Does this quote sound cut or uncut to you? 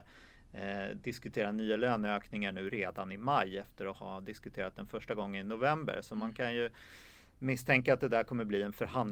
uncut